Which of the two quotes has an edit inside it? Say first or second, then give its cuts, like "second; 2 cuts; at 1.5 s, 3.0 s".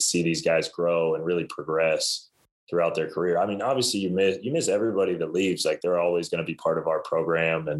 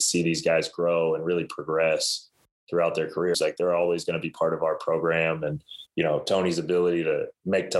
second; 2 cuts; at 3.3 s, 5.9 s